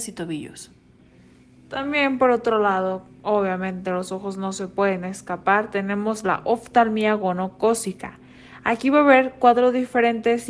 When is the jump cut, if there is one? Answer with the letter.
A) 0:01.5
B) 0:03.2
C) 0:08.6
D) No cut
D